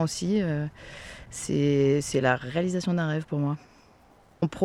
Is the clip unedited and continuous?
yes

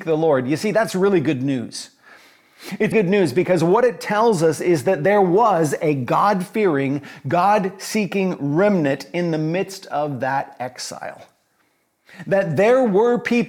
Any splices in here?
yes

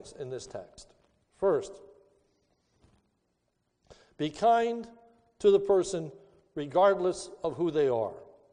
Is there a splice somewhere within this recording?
no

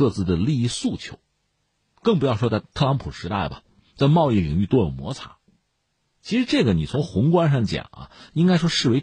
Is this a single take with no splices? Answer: yes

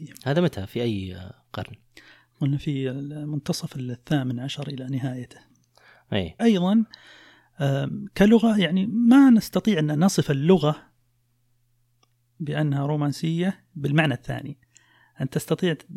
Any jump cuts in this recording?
yes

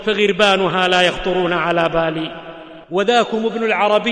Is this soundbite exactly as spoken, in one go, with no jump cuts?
no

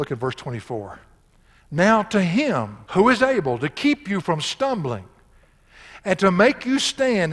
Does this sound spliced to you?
yes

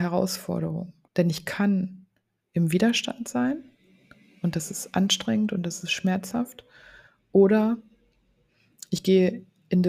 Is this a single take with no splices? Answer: no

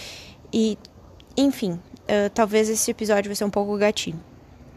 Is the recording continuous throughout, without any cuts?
yes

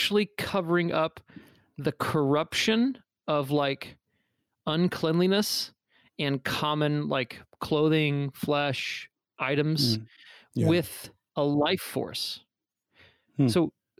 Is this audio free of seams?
yes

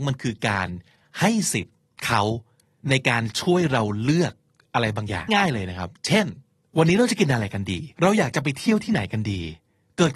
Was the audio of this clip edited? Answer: yes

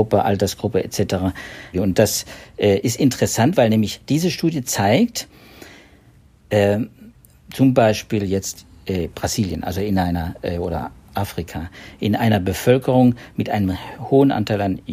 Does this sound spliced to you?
yes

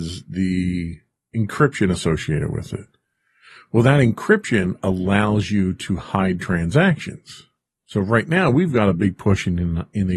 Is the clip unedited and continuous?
yes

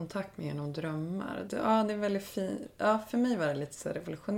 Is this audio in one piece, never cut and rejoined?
no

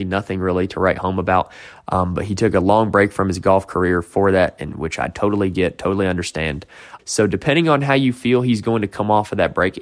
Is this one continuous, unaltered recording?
no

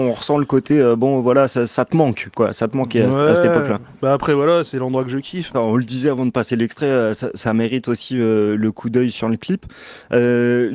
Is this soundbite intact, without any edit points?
no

